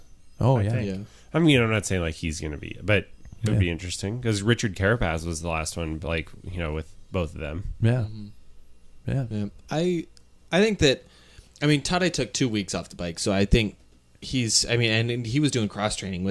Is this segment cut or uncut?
uncut